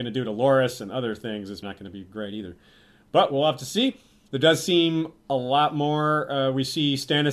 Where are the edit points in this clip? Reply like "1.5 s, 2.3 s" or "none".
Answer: 1.6 s